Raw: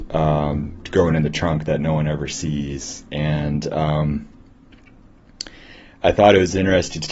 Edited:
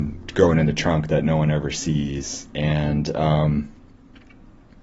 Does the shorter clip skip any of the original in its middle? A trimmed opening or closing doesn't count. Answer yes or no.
no